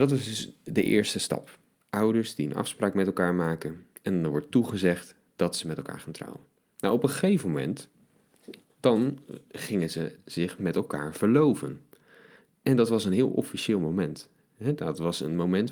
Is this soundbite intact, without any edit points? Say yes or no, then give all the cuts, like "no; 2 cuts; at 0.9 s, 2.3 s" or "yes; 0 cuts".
yes; 0 cuts